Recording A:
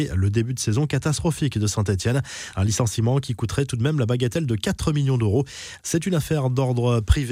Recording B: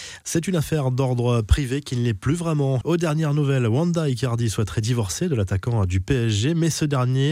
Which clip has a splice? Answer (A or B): B